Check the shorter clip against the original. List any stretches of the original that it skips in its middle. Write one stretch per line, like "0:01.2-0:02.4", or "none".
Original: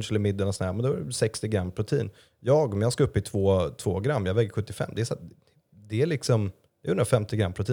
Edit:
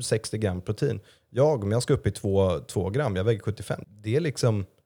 0:04.9-0:05.7